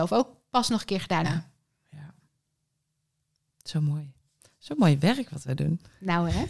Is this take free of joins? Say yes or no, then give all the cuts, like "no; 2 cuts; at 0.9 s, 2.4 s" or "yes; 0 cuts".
no; 1 cut; at 1.2 s